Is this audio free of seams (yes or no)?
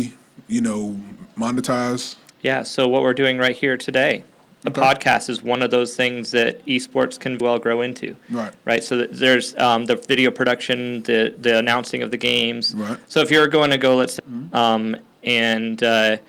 no